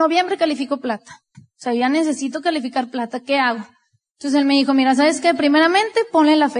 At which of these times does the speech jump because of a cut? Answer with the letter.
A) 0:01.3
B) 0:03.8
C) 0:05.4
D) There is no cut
A